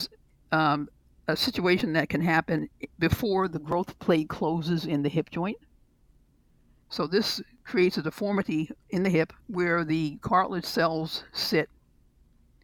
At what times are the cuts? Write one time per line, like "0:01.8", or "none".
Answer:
0:06.8
0:09.4